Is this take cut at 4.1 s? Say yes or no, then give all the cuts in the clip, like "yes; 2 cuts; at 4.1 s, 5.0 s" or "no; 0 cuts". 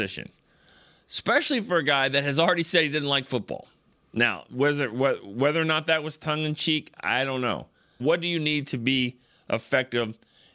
no; 1 cut; at 8.0 s